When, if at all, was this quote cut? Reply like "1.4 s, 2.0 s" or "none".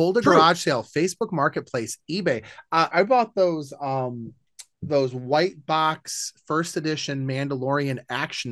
2.9 s